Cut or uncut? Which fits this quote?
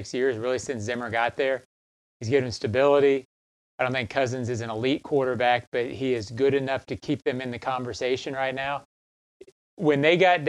uncut